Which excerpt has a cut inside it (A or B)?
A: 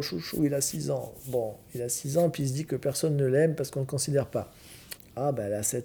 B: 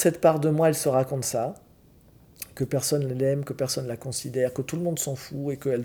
A